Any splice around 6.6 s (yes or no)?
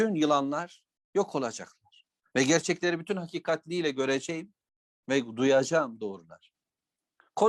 no